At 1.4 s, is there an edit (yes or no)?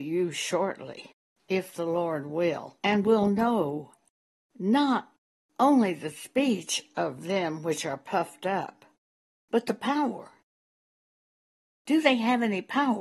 no